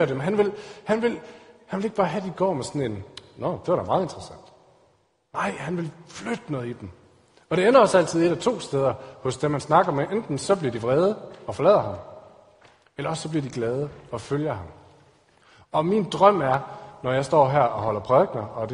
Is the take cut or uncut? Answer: uncut